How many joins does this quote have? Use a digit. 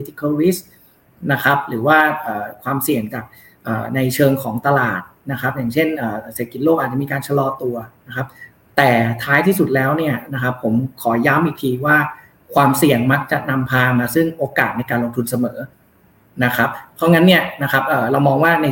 0